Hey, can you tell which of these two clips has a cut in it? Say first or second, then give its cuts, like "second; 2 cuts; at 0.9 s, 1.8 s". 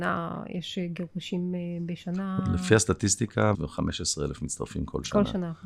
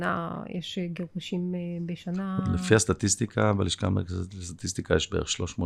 first; 1 cut; at 3.5 s